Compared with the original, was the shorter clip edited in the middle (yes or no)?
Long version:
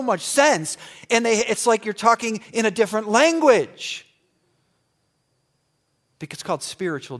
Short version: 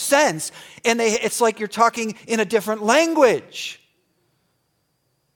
no